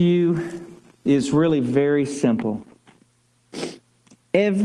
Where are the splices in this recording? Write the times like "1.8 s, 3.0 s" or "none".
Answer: none